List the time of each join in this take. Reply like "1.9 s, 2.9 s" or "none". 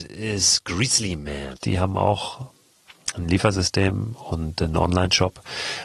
1.5 s